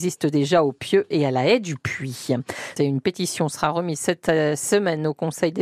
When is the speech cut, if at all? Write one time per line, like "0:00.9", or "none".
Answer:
0:02.8